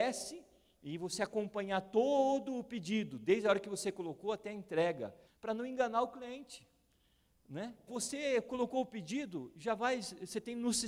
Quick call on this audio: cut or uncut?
cut